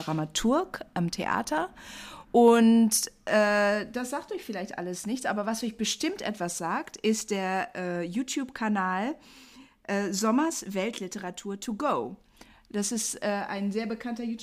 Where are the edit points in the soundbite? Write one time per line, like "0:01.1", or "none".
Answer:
none